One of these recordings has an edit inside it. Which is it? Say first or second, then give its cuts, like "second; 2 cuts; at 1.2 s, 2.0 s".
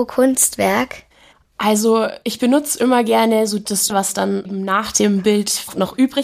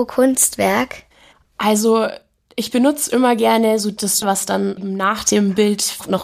first; 1 cut; at 2.2 s